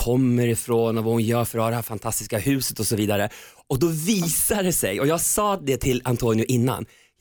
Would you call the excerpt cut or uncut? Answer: uncut